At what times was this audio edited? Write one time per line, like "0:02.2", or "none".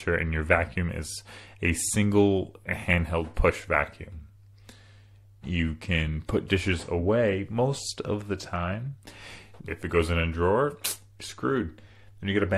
0:05.4
0:09.6